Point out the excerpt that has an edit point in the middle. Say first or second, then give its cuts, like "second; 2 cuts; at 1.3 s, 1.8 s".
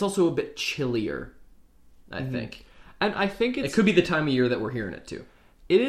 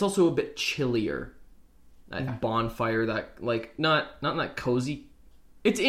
second; 1 cut; at 2.3 s